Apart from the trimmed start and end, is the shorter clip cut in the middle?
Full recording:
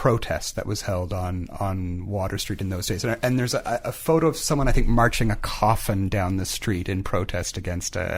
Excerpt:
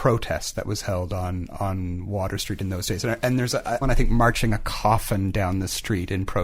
yes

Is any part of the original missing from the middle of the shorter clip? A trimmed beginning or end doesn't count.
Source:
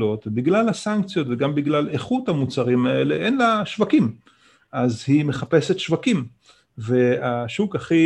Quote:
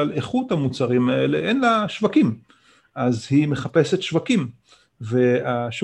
no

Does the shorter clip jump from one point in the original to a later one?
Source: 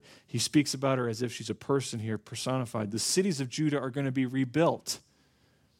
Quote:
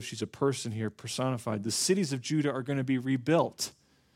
no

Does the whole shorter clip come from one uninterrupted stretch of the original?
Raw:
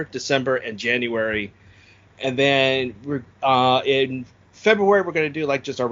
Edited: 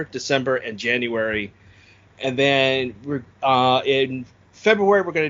yes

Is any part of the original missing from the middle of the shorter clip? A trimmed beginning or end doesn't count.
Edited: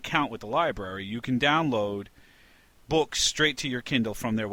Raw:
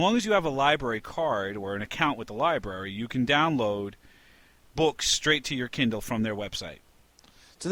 no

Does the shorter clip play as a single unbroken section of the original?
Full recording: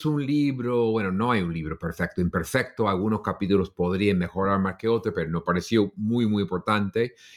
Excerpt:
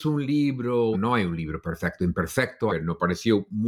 no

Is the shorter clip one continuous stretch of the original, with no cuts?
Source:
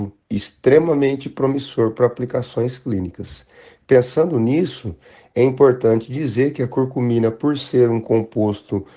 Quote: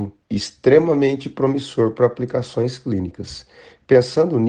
yes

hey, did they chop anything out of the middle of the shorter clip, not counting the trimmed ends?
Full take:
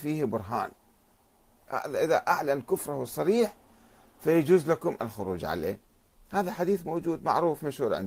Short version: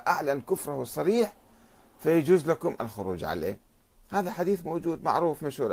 no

